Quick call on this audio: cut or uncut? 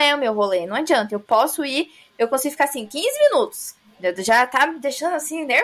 uncut